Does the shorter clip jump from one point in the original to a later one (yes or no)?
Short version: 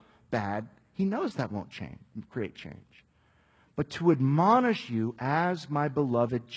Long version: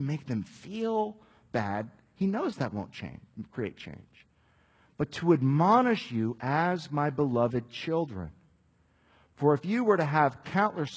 no